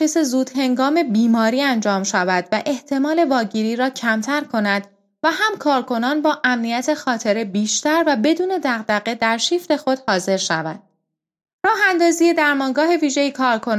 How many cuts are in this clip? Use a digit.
0